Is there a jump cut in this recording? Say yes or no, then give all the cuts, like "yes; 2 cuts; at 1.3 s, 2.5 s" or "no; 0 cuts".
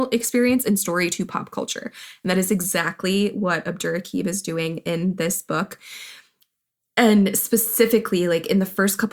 no; 0 cuts